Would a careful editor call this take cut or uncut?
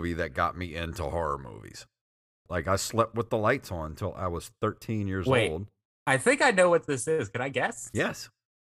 cut